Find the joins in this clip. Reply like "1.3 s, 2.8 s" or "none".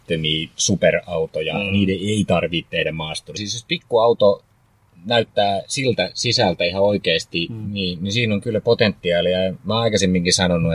3.4 s

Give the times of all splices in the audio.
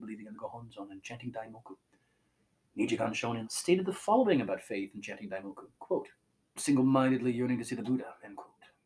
3.4 s, 6.6 s

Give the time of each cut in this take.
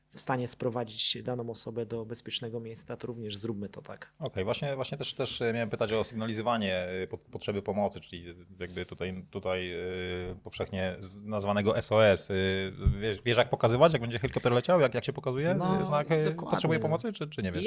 none

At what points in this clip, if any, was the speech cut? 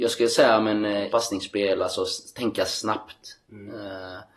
1.1 s

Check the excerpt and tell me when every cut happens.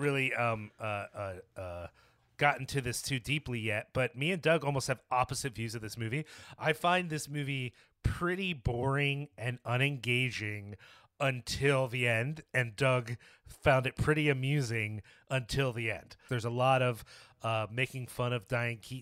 16.3 s

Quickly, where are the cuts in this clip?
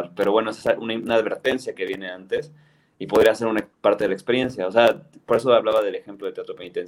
none

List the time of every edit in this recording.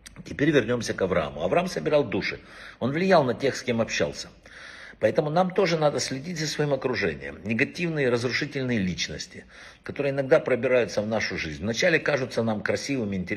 none

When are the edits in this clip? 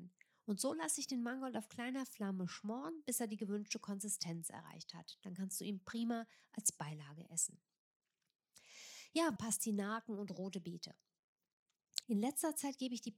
9.4 s, 12.0 s

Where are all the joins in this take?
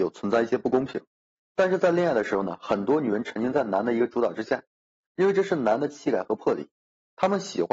1.3 s

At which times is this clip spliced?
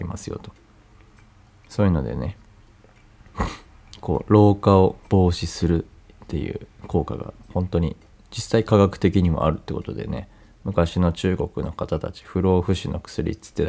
5.0 s

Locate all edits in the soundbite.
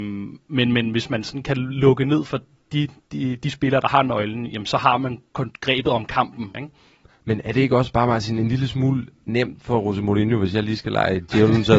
6.5 s

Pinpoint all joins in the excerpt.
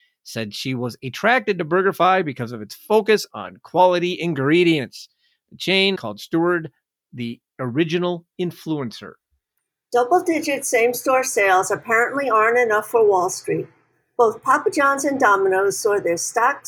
6.0 s

